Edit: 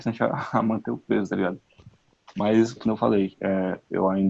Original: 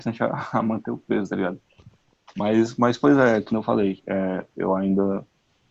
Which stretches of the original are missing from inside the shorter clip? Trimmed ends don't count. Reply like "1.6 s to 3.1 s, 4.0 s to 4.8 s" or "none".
2.8 s to 3.4 s